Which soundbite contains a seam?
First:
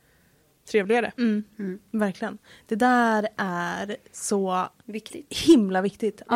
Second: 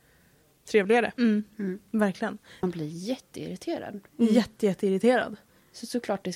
second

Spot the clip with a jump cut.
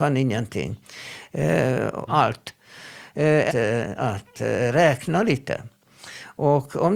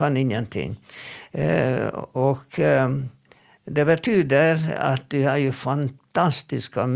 first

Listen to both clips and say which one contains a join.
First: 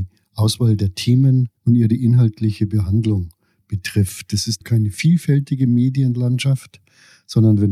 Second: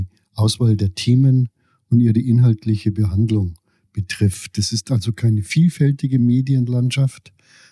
first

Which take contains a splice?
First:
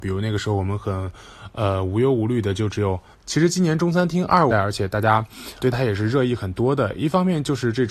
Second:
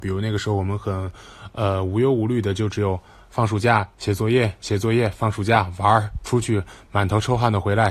first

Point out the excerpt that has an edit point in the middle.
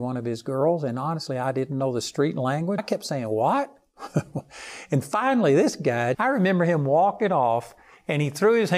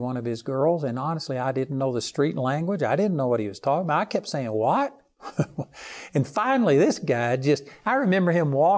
first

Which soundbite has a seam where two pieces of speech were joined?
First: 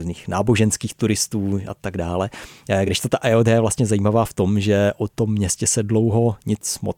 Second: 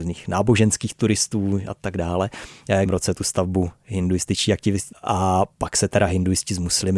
second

